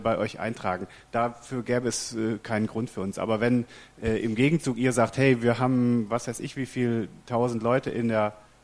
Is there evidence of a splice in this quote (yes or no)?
no